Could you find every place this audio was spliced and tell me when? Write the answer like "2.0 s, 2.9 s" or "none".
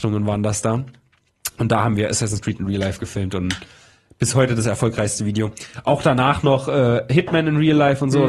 none